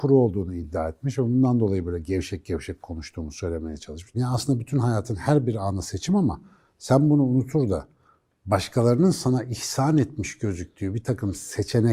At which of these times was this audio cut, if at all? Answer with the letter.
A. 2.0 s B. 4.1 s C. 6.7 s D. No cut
B